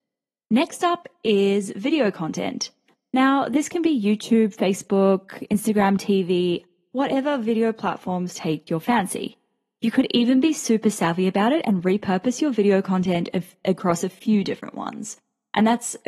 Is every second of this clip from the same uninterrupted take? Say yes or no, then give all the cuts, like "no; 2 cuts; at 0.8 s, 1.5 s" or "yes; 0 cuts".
yes; 0 cuts